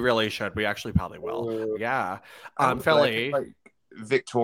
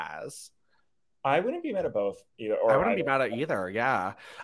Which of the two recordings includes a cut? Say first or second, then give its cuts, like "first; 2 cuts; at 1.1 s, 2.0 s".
first; 2 cuts; at 1.8 s, 2.8 s